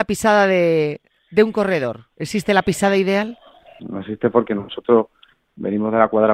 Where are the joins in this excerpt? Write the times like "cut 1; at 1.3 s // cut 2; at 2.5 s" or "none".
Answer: cut 1; at 3.8 s